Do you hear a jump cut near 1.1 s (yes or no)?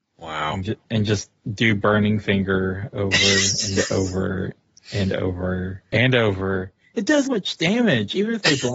no